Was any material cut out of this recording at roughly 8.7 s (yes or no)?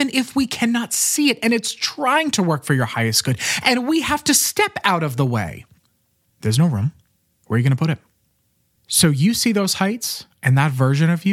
no